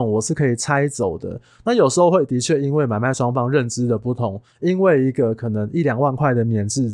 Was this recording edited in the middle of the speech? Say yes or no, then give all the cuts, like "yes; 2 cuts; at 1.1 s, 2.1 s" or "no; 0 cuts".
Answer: no; 0 cuts